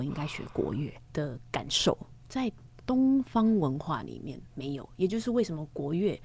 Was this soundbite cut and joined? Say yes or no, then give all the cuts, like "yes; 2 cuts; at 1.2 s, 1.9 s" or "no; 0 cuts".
yes; 3 cuts; at 1.0 s, 2.2 s, 4.5 s